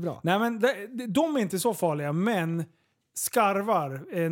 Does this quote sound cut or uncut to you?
uncut